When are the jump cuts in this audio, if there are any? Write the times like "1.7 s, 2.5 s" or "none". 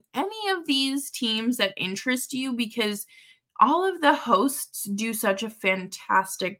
none